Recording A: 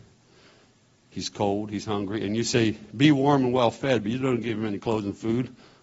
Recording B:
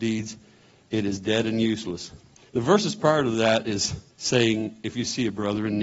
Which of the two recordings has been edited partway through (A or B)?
B